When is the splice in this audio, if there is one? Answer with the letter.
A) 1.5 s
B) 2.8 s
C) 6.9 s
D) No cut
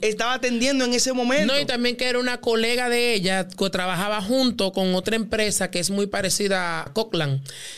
C